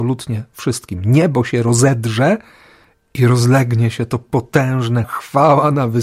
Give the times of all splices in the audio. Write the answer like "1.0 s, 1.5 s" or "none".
3.0 s, 5.0 s